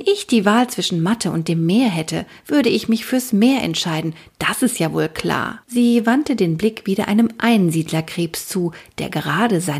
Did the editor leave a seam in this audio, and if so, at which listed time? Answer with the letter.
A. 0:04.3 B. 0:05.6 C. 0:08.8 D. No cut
B